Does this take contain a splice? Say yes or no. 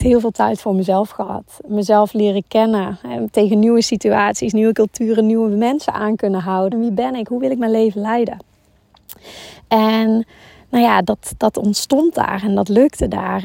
yes